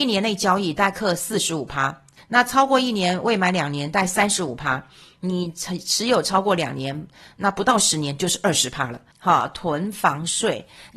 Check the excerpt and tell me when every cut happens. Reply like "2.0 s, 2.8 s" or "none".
2.2 s, 9.1 s